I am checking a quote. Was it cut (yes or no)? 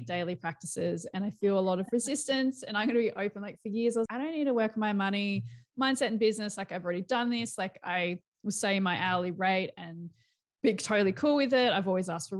yes